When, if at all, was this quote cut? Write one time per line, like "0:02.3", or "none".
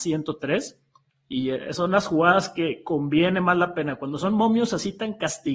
none